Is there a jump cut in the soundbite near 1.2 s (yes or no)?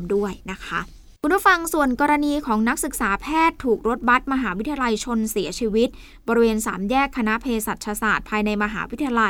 yes